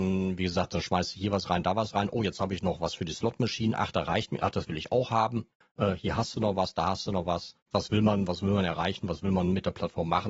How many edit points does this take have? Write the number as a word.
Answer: one